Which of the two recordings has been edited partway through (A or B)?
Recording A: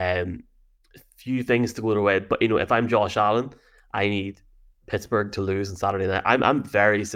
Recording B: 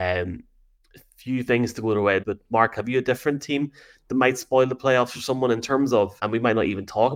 B